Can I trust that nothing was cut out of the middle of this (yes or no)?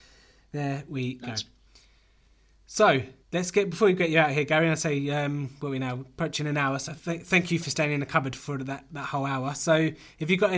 no